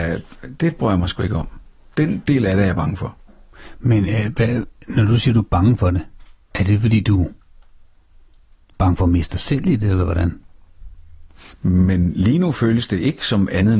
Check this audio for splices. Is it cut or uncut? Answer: cut